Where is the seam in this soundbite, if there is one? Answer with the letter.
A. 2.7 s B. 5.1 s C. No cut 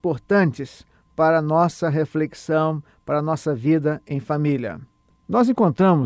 B